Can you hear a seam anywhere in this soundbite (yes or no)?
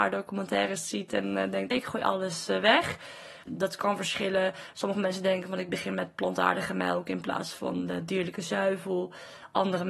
yes